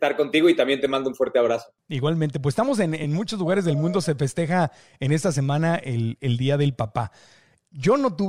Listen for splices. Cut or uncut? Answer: uncut